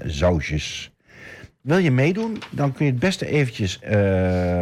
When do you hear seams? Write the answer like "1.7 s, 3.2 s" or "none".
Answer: 1.6 s